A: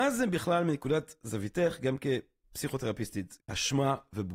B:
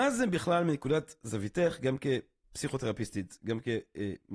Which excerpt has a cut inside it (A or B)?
A